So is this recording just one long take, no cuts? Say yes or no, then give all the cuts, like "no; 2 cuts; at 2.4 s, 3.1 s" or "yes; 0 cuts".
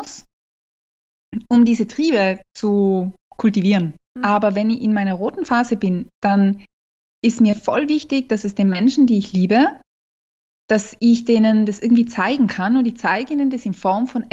no; 1 cut; at 4.1 s